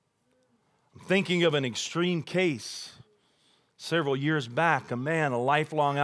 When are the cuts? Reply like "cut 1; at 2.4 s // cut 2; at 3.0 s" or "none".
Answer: none